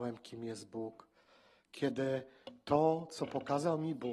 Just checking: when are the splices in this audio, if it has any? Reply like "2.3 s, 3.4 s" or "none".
none